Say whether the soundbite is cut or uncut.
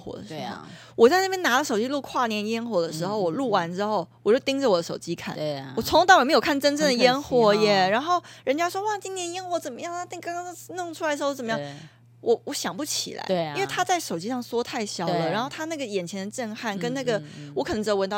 uncut